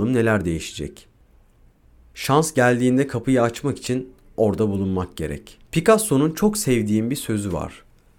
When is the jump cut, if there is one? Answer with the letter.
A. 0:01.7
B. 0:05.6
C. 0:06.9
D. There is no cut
B